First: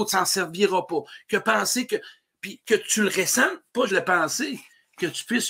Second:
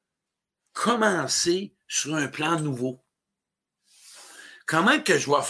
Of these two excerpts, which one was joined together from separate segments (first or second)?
first